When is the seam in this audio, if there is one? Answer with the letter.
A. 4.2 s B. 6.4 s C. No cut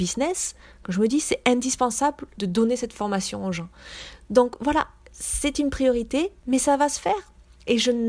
B